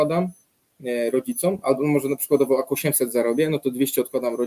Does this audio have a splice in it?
no; 0 cuts

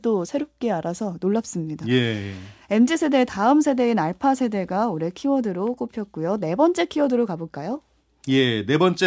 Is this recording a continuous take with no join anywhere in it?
yes; 0 cuts

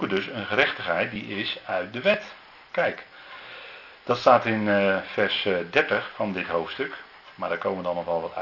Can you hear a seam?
no; 0 cuts

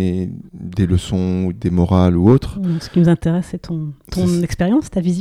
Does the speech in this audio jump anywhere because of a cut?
no; 0 cuts

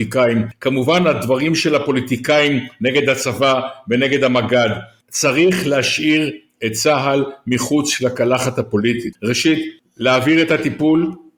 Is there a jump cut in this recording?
yes; 1 cut; at 9.1 s

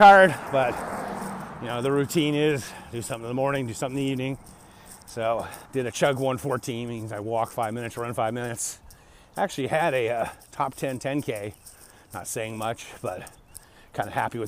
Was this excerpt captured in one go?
no; 1 cut; at 5.6 s

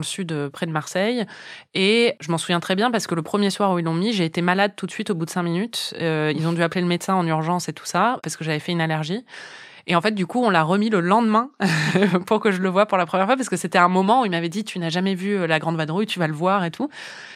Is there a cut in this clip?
no; 0 cuts

